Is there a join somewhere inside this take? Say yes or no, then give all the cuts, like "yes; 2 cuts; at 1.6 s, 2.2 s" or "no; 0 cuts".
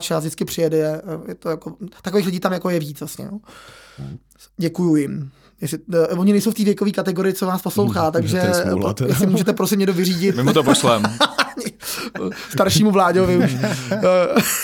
no; 0 cuts